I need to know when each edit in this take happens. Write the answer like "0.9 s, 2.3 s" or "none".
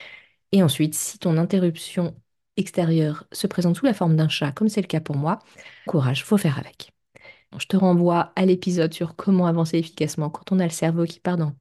5.9 s, 7.5 s